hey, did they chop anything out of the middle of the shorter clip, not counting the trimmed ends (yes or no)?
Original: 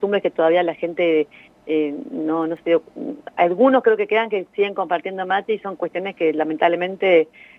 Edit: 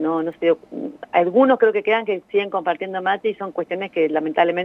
no